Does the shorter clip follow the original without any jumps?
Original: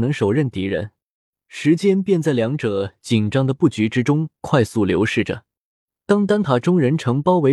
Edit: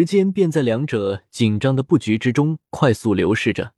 yes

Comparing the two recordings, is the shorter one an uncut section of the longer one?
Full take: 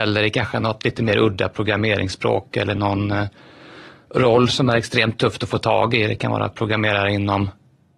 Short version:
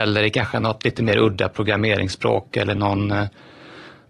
yes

